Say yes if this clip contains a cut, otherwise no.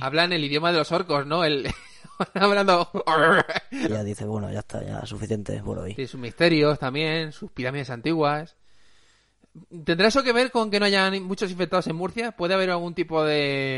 yes